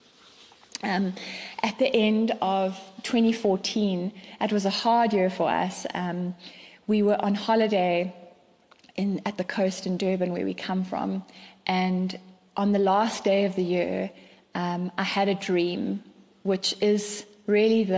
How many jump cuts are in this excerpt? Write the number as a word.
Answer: zero